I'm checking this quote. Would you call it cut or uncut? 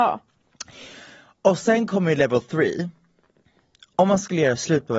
uncut